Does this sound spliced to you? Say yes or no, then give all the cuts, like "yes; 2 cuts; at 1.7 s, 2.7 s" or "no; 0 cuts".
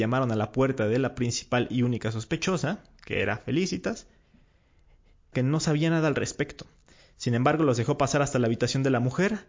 yes; 1 cut; at 5.3 s